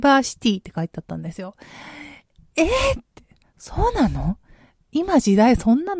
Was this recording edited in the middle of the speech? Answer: no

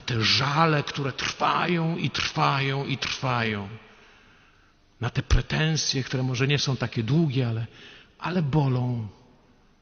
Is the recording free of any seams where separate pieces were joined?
yes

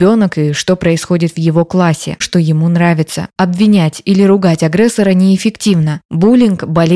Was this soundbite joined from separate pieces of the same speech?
yes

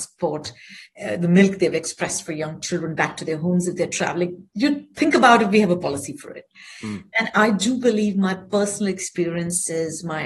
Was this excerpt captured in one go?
yes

